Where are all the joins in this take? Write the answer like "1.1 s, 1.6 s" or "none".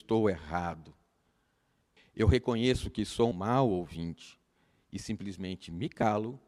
2.0 s, 3.3 s

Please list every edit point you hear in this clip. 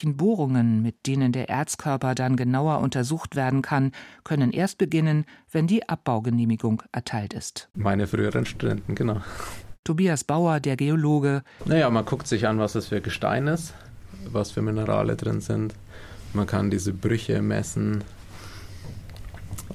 7.7 s, 11.6 s

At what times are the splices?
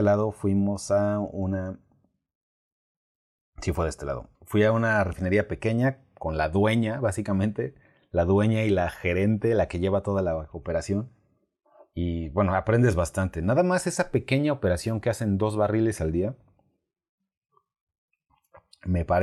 4.3 s

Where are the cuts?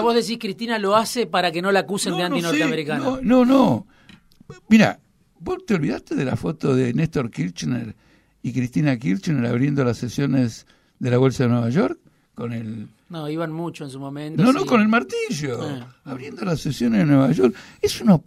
none

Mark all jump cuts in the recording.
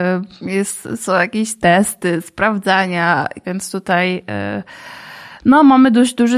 3.4 s

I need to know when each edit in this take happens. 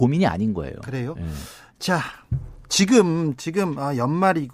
none

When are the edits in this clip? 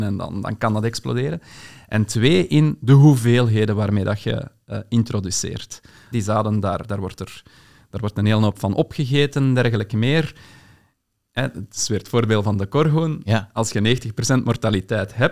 6.1 s

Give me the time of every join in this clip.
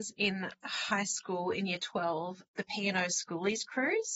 2.5 s

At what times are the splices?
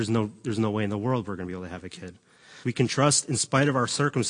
2.6 s

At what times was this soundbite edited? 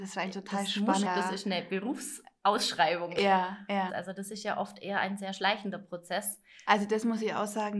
1.1 s, 3.9 s, 6.7 s

